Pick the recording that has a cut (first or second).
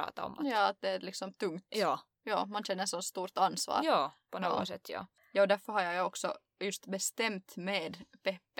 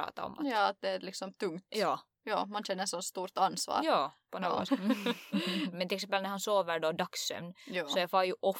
second